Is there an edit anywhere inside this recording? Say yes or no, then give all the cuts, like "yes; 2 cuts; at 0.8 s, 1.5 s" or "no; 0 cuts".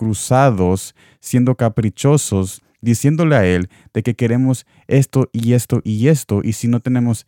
no; 0 cuts